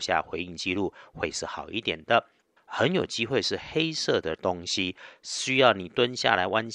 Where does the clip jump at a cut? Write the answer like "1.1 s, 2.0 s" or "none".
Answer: 2.6 s